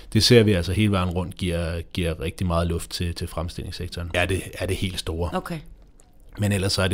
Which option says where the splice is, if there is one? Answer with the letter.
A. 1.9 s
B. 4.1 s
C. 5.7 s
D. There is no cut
B